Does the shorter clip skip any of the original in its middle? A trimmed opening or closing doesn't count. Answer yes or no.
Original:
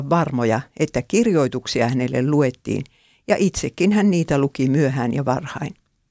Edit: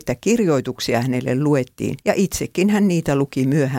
yes